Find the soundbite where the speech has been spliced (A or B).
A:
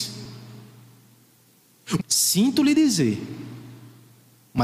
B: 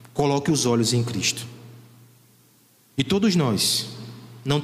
A